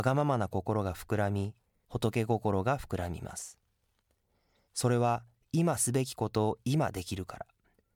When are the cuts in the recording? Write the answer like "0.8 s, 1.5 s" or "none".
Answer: 1.8 s, 4.7 s